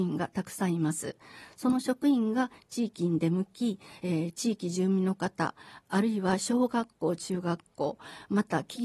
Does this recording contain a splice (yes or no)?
no